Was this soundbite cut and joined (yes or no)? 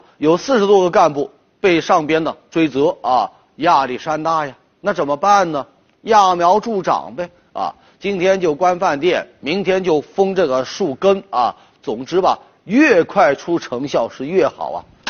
no